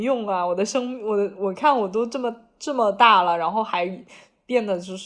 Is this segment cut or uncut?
uncut